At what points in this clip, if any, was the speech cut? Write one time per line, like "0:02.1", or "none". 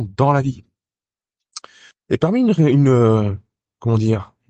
0:01.9